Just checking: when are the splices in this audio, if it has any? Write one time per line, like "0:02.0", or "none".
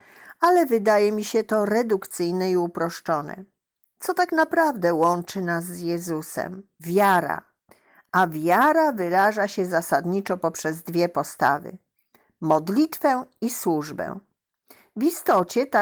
none